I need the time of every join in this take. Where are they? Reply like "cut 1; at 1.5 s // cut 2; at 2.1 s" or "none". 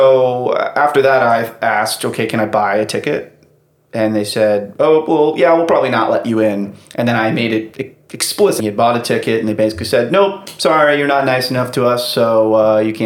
cut 1; at 8.6 s